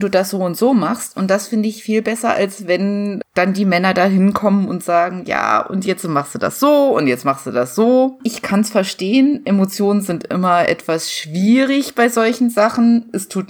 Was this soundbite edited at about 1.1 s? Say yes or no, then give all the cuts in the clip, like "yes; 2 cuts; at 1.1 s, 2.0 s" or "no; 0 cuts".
no; 1 cut; at 8.2 s